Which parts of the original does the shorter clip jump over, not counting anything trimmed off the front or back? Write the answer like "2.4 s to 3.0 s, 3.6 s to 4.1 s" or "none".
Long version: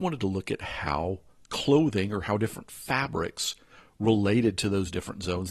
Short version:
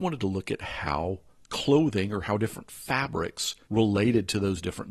3.7 s to 4.0 s